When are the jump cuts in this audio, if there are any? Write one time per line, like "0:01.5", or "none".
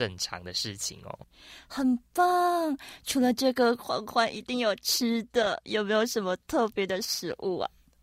none